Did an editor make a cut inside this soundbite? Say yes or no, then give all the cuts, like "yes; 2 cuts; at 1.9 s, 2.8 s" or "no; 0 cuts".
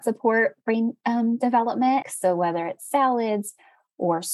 yes; 1 cut; at 2.0 s